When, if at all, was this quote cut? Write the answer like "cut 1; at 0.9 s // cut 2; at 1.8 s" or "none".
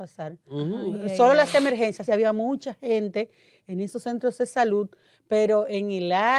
cut 1; at 2.1 s